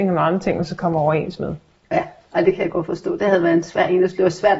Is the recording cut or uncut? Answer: uncut